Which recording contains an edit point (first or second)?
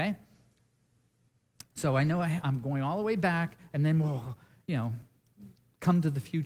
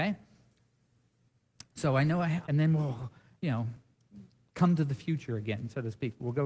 second